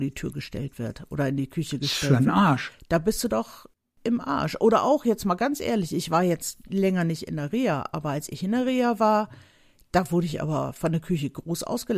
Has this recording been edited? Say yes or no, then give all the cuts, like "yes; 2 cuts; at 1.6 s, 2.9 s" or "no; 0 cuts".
no; 0 cuts